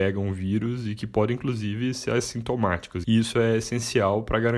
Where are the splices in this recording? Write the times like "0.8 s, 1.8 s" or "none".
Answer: 3.0 s